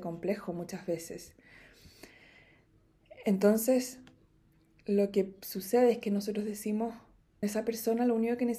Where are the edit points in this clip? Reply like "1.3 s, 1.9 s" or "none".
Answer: 7.4 s